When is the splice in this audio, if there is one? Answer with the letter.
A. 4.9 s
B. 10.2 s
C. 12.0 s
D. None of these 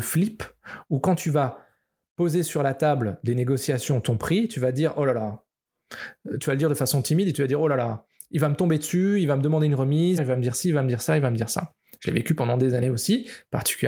B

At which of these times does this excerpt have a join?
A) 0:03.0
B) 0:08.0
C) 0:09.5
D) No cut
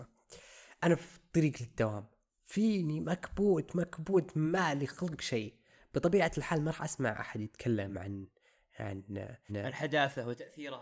C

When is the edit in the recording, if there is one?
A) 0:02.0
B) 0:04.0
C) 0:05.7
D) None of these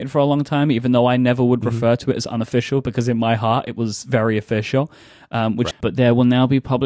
C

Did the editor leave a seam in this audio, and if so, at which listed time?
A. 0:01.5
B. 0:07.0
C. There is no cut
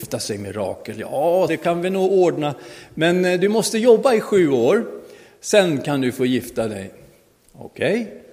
A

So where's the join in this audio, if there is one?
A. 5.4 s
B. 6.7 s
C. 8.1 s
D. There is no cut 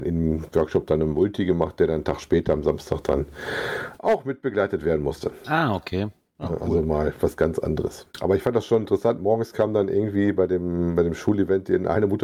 C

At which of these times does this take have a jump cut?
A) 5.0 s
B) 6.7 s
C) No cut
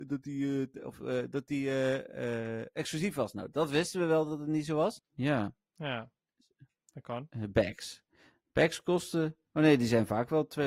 A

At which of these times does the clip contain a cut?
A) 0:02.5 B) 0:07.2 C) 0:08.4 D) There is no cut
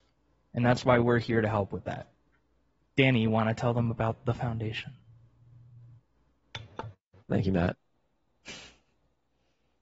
B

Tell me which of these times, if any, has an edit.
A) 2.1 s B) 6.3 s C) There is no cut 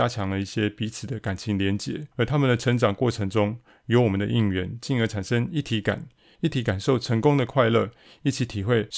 A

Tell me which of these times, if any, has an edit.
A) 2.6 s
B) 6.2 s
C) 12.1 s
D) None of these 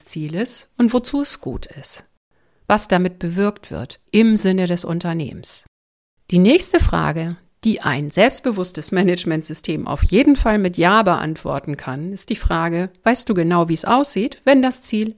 D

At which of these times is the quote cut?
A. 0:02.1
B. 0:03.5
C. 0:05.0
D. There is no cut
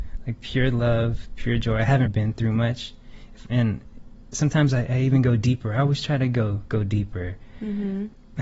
A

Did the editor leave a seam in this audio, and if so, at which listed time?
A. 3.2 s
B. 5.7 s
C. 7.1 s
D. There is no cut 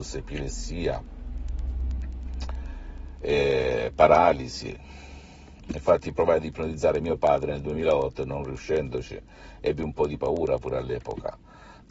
B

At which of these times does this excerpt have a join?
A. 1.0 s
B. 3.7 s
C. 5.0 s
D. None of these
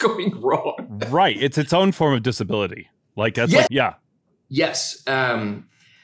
B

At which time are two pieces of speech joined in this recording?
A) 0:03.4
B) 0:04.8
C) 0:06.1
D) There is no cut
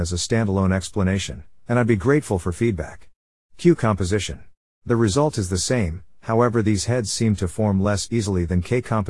B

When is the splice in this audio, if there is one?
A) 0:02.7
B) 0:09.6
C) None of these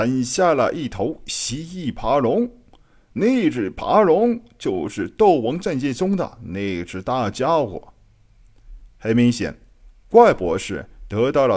C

